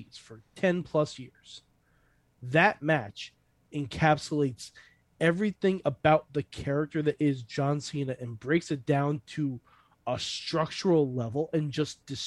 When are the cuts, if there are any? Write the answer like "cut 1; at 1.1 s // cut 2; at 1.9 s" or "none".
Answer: none